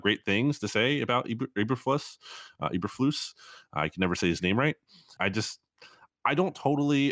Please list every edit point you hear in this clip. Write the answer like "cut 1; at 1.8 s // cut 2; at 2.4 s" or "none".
cut 1; at 5.2 s